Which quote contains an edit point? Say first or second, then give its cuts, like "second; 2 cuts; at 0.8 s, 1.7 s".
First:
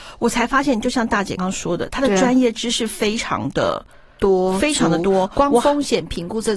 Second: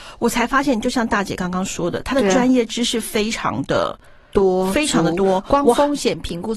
first; 1 cut; at 1.4 s